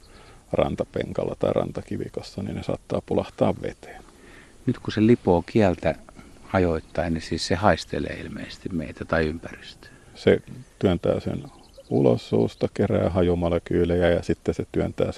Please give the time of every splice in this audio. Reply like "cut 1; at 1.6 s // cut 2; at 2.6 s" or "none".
cut 1; at 10.1 s